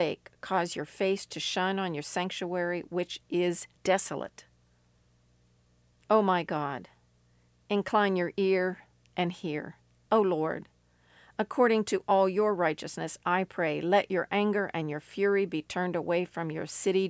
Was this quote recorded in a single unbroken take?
no; 2 cuts; at 3.8 s, 10.1 s

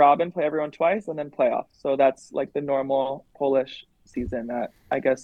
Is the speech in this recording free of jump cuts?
yes; 0 cuts

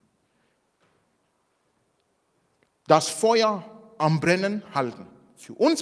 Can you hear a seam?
no; 0 cuts

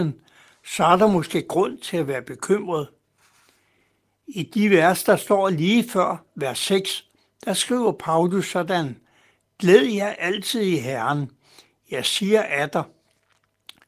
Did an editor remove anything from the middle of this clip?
no; 0 cuts

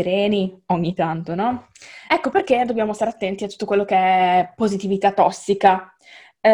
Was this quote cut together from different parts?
yes; 1 cut; at 2.1 s

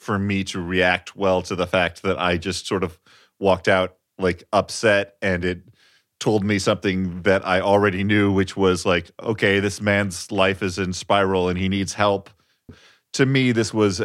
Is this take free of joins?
no; 1 cut; at 12.7 s

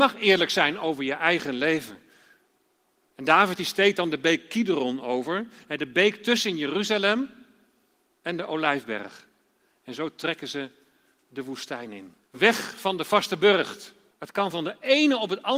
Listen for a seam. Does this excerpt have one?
yes; 3 cuts; at 3.1 s, 12.2 s, 14.1 s

